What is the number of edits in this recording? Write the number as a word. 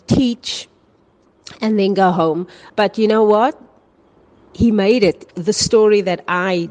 two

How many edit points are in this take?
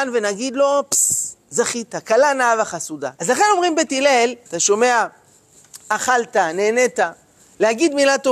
two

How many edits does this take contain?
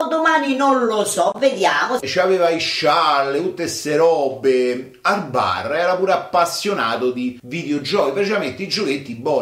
one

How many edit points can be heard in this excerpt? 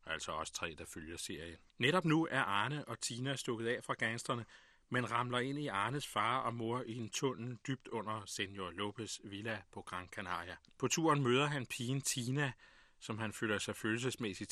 two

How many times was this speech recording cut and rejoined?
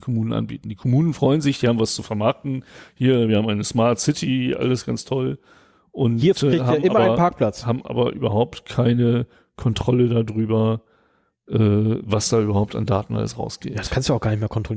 zero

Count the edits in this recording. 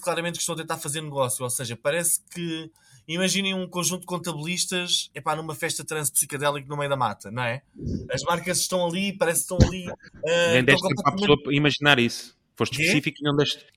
one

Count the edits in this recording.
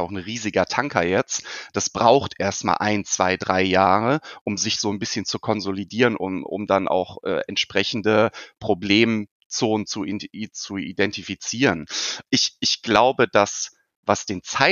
one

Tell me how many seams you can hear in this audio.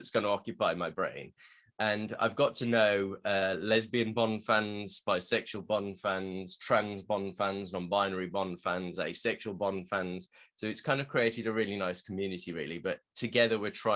zero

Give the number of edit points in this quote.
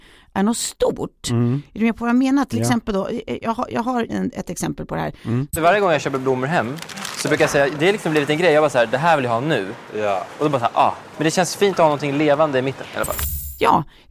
two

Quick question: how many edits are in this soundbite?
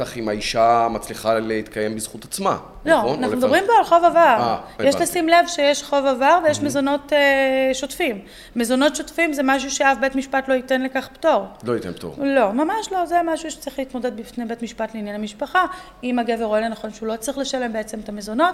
zero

